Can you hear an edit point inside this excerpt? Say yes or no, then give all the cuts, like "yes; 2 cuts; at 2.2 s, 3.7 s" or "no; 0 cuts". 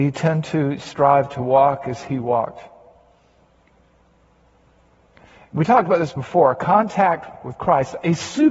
no; 0 cuts